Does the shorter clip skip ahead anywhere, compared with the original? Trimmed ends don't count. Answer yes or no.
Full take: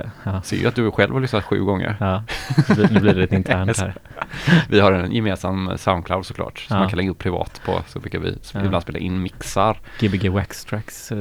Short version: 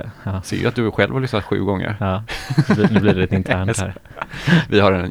no